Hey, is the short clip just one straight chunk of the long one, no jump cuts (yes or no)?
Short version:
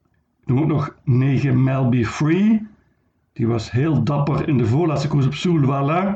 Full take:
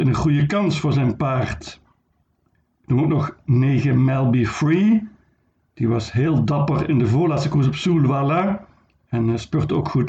yes